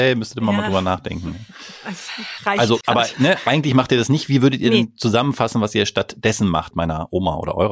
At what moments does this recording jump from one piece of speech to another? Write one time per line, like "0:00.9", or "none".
0:02.8
0:06.7

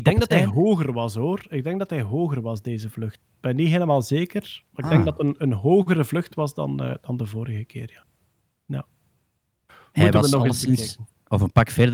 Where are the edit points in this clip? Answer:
none

